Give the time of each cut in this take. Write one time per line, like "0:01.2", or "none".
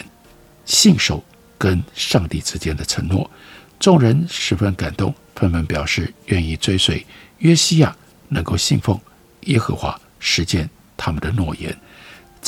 none

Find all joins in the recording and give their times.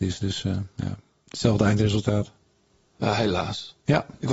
none

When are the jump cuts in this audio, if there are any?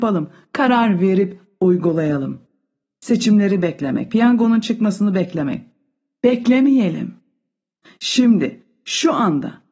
0:04.1

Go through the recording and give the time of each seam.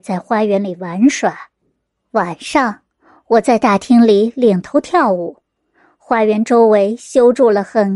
none

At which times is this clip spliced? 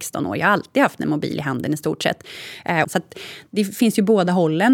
0:02.8

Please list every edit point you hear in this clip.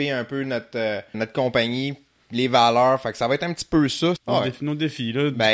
0:01.1
0:04.2

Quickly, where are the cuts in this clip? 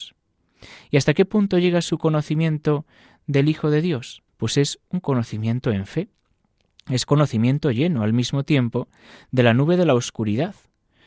0:04.3

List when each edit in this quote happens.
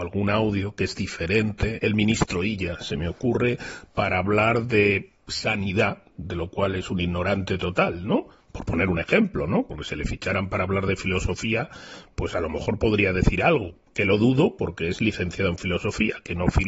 0:01.8

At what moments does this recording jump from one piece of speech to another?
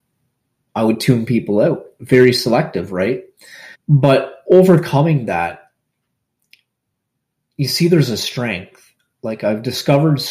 0:03.7

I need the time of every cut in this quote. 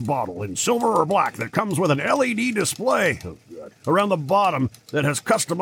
0:03.8

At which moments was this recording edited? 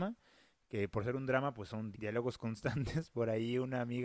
0:01.9

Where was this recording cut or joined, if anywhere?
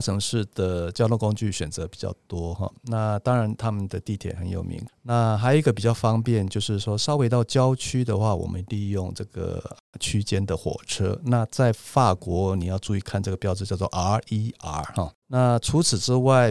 0:04.9
0:15.2

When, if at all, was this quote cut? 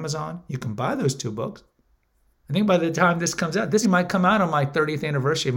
0:03.8

